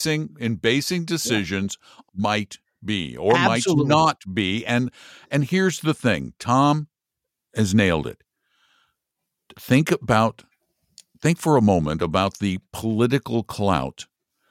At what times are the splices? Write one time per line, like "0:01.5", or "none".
0:02.1